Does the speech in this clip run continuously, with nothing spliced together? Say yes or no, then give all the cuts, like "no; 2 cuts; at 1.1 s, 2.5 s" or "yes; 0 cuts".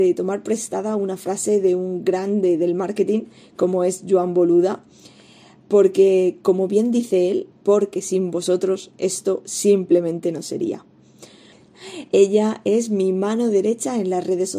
no; 2 cuts; at 7.5 s, 11.5 s